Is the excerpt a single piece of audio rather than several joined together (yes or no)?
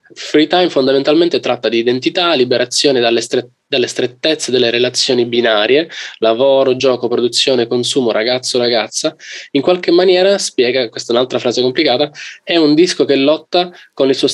yes